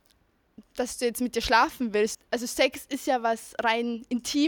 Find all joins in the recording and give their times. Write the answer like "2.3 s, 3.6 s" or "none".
2.1 s